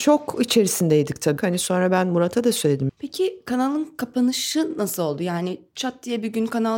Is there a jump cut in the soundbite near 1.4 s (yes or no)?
yes